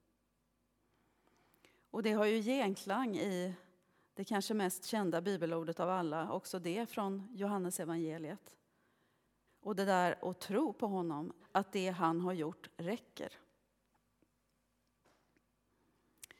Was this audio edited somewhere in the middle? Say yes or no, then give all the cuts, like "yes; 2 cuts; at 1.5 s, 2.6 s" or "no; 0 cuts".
yes; 2 cuts; at 9.5 s, 11.4 s